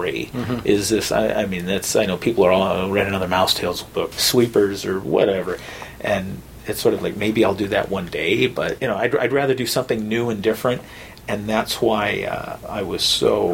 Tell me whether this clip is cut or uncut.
cut